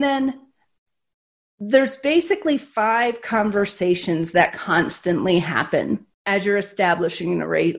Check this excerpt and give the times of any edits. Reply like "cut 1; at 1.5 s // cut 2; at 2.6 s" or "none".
cut 1; at 6.1 s